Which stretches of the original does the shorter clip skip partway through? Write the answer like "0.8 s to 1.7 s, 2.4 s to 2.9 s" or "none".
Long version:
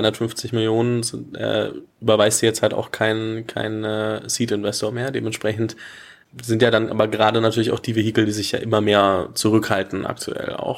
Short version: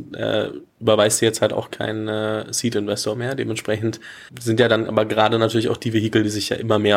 2.9 s to 3.5 s, 6.0 s to 6.3 s